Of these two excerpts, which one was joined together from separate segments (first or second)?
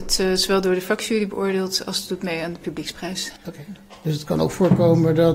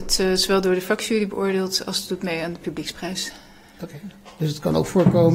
first